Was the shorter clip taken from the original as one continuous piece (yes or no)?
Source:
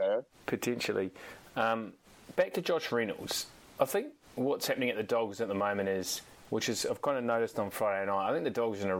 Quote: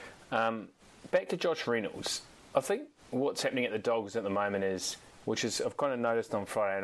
yes